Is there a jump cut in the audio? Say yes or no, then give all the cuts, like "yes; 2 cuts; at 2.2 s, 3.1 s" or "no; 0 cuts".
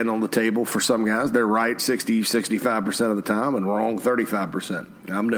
yes; 1 cut; at 1.8 s